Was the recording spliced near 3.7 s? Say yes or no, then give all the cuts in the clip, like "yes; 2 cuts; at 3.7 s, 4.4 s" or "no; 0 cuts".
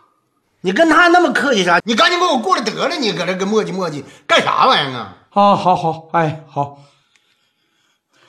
no; 2 cuts; at 1.8 s, 5.8 s